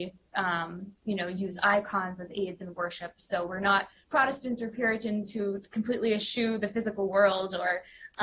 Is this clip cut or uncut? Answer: uncut